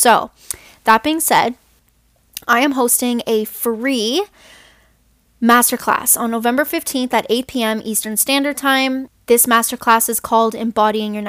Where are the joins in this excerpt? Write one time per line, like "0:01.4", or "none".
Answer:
none

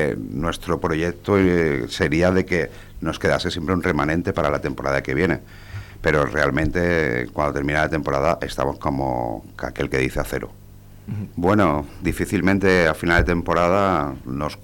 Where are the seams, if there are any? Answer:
0:11.3

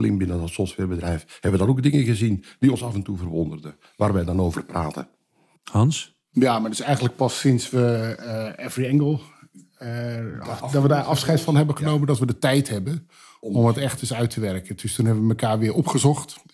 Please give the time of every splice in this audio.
none

